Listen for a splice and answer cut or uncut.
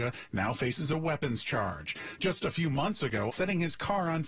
cut